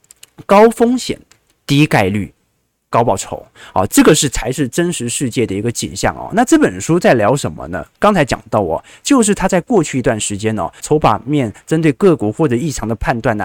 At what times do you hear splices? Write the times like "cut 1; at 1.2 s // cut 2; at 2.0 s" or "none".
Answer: cut 1; at 10.8 s